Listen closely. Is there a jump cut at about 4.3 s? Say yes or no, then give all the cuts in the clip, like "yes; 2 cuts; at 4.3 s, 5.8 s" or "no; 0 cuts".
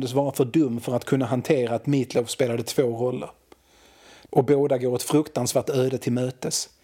yes; 1 cut; at 4.3 s